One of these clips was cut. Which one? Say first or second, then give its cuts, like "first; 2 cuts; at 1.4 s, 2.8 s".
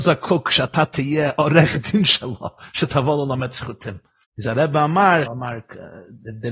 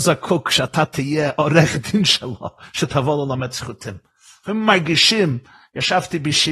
first; 2 cuts; at 4.2 s, 5.3 s